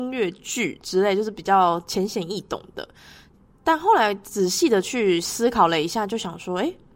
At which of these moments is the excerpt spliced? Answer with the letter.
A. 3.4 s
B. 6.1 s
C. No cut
C